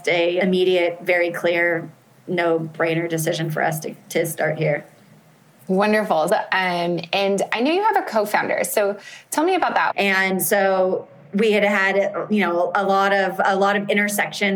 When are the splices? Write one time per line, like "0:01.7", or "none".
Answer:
0:06.3
0:09.9